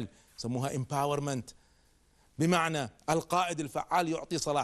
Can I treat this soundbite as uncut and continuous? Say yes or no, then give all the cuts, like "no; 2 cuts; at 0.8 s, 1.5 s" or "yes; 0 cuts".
no; 1 cut; at 3.0 s